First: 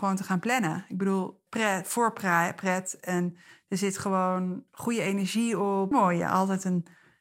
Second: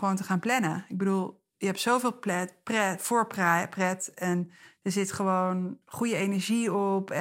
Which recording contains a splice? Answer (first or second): first